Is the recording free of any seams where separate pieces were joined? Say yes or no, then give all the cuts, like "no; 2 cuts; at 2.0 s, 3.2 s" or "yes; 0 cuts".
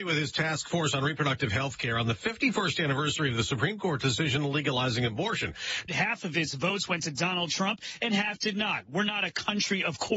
no; 1 cut; at 5.9 s